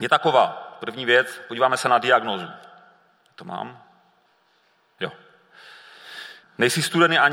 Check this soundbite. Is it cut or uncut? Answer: cut